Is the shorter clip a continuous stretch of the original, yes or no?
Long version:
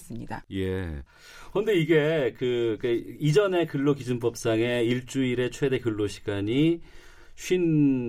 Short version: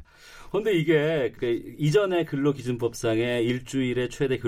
no